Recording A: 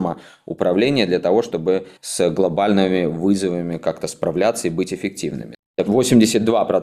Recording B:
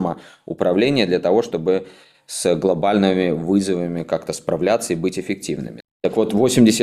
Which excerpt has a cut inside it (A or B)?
A